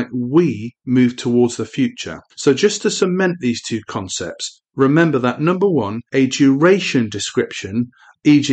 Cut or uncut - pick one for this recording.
cut